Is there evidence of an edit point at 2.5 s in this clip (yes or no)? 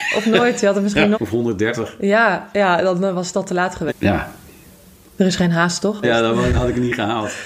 no